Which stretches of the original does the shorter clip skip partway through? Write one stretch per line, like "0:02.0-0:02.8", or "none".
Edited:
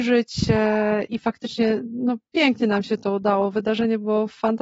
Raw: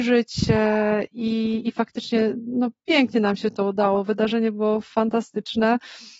0:01.1-0:01.6